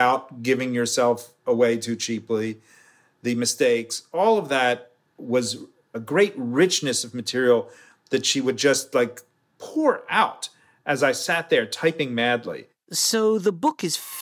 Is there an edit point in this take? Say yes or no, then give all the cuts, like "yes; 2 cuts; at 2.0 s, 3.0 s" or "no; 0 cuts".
no; 0 cuts